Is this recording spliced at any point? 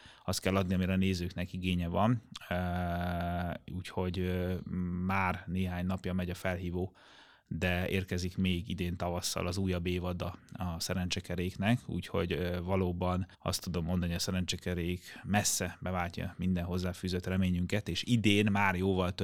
yes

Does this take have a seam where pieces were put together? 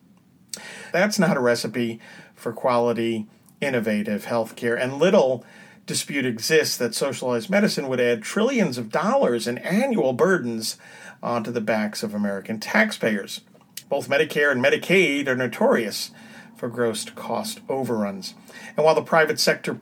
yes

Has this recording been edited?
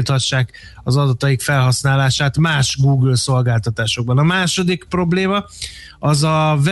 no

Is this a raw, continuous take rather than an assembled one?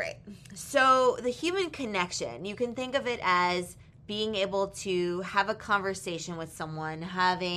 yes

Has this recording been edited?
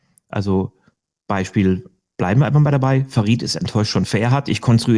no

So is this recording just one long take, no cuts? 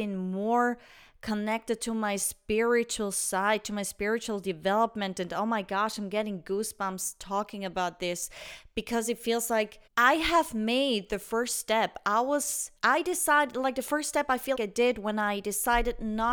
no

